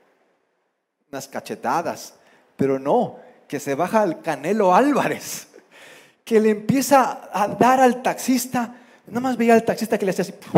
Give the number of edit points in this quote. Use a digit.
0